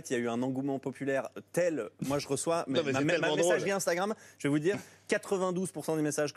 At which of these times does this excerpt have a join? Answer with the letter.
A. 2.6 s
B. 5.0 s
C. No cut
C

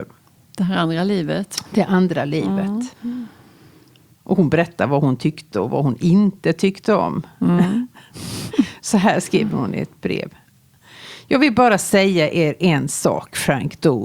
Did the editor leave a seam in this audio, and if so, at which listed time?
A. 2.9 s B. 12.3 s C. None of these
A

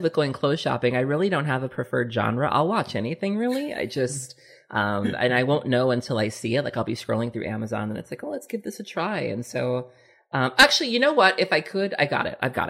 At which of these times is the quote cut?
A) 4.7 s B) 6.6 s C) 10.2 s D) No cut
D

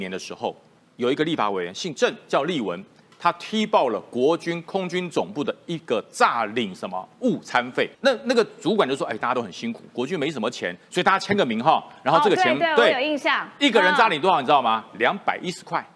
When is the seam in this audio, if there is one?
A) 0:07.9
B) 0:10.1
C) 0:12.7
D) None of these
A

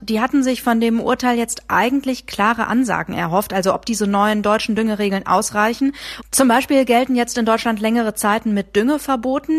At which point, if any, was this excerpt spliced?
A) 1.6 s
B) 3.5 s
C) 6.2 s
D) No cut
C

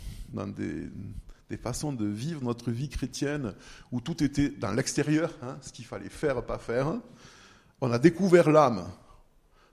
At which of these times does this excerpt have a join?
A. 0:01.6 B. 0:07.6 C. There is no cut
C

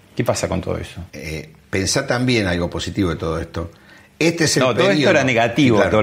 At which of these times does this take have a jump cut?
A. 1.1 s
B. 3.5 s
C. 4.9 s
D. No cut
A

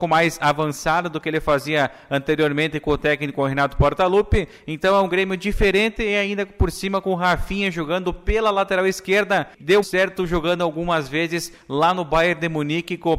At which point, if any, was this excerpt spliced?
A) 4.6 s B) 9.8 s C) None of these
B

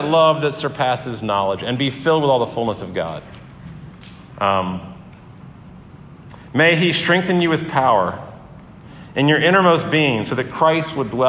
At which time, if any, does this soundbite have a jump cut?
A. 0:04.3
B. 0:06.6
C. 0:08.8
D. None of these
A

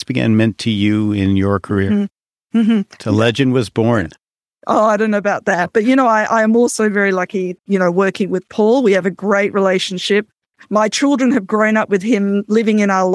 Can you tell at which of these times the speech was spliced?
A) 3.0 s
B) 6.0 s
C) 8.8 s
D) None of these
A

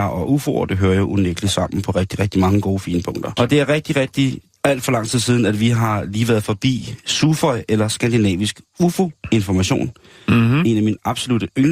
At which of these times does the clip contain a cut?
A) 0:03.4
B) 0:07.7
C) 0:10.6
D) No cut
A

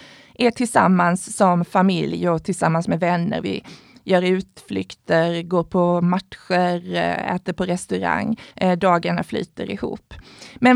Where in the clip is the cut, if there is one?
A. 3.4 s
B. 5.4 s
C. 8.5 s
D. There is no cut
C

